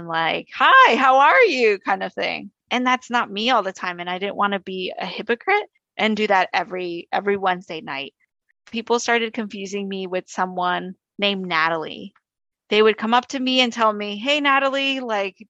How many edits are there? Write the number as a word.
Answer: zero